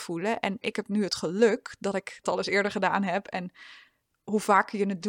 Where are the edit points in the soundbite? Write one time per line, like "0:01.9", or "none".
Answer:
0:02.2